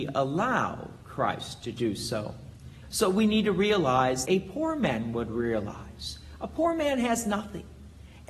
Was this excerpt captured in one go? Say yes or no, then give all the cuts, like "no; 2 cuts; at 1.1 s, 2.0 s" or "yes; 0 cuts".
no; 2 cuts; at 2.8 s, 4.2 s